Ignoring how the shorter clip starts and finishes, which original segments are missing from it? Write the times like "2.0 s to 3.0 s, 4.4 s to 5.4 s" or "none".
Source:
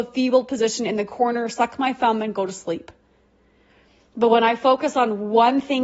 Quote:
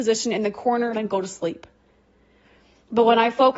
1.5 s to 2.2 s